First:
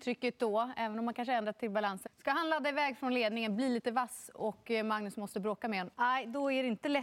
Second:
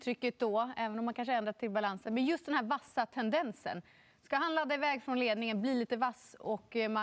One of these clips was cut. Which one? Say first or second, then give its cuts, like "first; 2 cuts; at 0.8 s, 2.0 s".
first; 2 cuts; at 2.1 s, 5.9 s